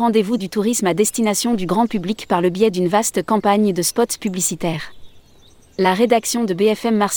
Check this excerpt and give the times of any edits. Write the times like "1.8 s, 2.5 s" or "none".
none